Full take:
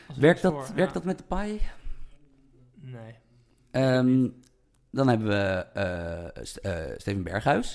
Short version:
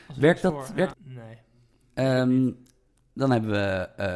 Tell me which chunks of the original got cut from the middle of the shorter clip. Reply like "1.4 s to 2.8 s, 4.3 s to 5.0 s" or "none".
0.9 s to 2.7 s